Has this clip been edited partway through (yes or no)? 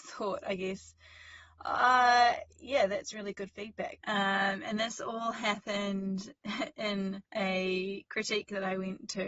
yes